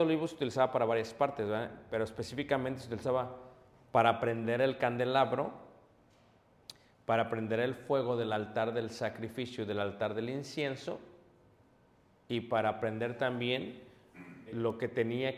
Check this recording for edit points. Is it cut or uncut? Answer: cut